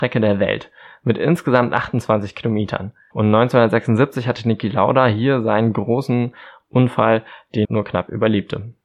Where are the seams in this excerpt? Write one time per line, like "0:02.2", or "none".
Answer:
0:03.1
0:07.6